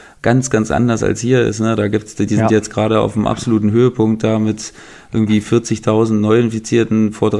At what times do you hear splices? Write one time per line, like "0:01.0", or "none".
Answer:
none